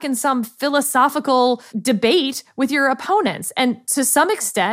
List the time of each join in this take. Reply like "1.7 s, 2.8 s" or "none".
1.7 s